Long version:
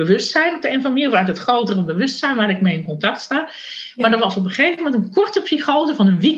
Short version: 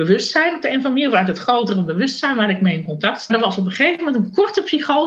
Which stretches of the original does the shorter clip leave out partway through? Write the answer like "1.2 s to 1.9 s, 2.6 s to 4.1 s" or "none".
3.3 s to 4.1 s

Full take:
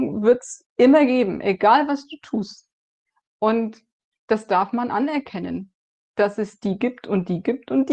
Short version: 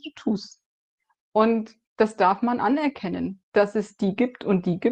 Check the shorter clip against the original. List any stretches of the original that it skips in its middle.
3.9 s to 4.2 s, 5.7 s to 6.1 s

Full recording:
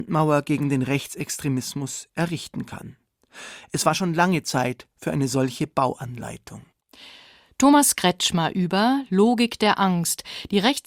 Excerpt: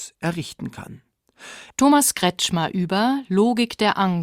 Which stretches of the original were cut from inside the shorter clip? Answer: 3.6 s to 7.5 s

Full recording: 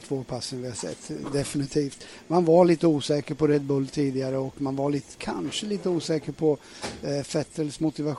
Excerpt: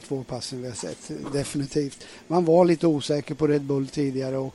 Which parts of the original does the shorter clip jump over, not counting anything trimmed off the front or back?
none

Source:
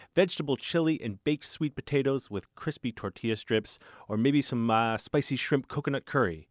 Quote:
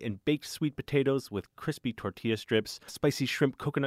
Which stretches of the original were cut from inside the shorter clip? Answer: 3.9 s to 5.0 s

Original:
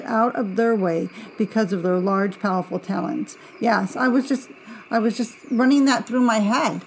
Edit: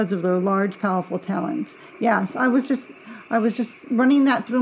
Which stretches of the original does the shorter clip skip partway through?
none

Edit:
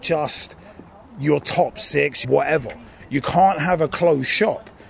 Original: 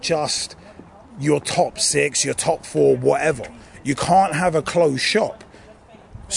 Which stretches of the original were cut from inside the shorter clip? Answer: 2.2 s to 3.0 s

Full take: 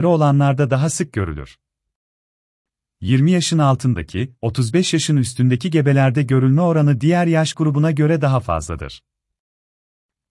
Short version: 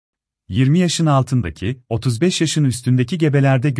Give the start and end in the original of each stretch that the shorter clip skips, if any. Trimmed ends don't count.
none

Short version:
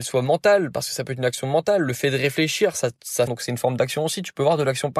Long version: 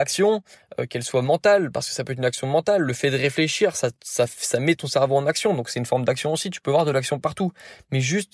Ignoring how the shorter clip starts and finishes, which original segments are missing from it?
4.3 s to 5.6 s

